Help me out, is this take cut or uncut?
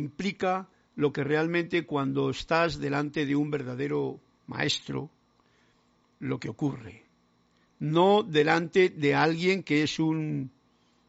uncut